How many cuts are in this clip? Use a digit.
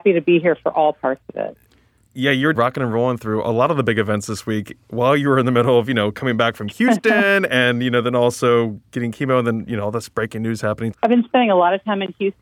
2